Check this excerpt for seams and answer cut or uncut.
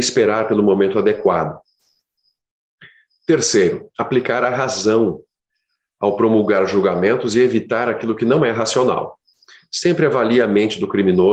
uncut